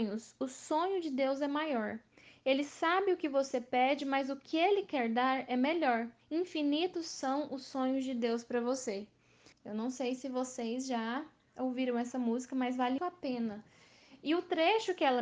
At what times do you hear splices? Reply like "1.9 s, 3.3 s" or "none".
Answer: 6.2 s, 9.5 s, 13.0 s